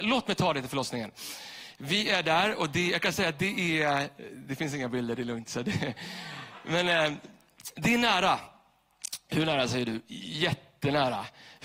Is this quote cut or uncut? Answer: uncut